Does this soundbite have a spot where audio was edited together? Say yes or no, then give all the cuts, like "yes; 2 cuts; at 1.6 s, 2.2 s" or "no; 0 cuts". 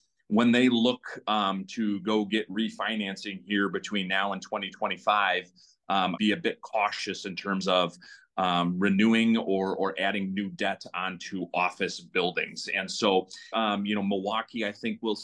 yes; 2 cuts; at 6.2 s, 13.5 s